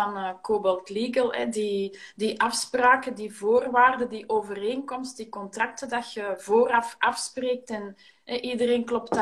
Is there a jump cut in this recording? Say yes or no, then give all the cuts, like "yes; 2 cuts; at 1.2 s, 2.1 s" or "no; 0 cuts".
no; 0 cuts